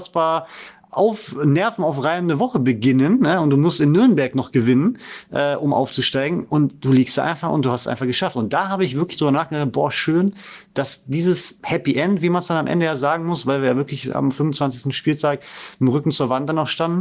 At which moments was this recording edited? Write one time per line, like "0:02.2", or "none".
none